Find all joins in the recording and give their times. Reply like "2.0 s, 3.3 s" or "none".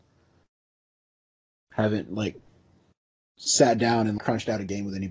4.2 s